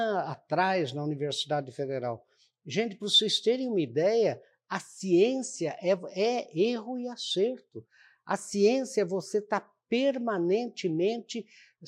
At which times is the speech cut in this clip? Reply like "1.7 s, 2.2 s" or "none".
none